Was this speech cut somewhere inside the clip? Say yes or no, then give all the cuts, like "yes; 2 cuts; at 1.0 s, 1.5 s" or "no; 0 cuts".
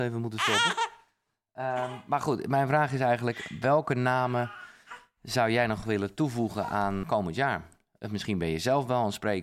yes; 1 cut; at 7.0 s